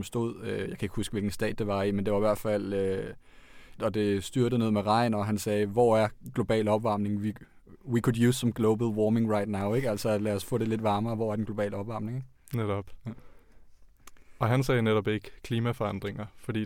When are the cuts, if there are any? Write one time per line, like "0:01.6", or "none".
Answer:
0:03.8